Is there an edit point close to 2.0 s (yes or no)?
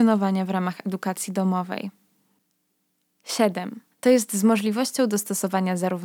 no